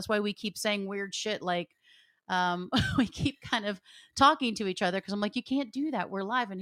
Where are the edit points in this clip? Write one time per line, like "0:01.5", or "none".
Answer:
none